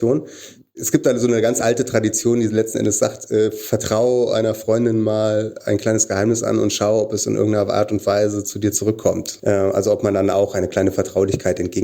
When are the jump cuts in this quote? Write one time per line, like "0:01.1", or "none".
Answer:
none

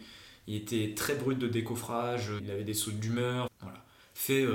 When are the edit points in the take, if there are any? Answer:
0:02.4
0:03.5

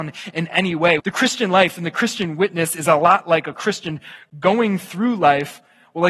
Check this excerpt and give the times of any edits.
0:01.0

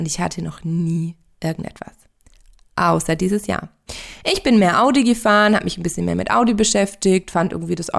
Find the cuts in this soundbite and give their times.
none

